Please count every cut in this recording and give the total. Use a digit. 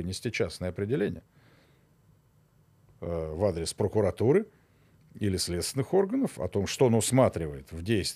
1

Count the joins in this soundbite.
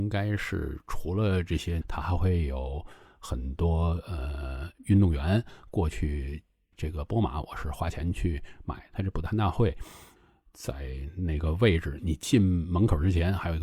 2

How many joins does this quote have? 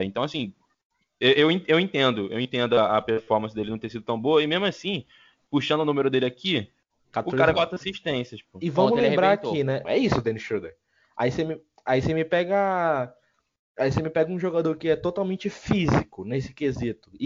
2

